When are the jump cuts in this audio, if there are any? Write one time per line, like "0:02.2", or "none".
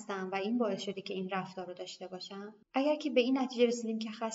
0:02.6